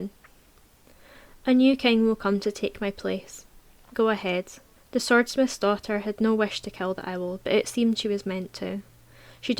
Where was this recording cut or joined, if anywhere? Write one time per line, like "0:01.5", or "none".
0:04.8